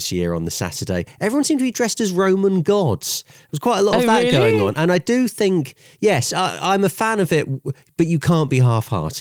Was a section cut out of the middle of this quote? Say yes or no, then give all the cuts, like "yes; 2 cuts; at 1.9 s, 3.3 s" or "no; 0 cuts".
no; 0 cuts